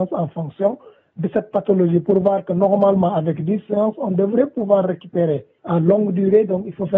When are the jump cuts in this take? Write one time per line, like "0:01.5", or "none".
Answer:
0:05.6